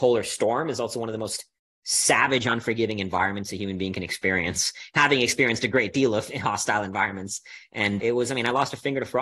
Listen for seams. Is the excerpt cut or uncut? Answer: cut